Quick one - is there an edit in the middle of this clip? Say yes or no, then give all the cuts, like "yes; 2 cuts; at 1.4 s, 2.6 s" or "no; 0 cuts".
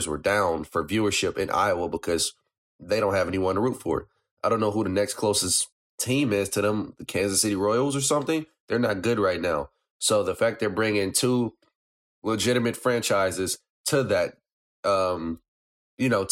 no; 0 cuts